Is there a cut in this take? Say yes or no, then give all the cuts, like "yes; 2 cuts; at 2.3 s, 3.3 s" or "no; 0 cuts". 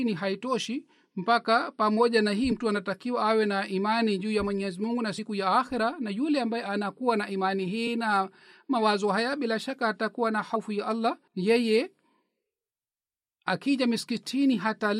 yes; 1 cut; at 11.3 s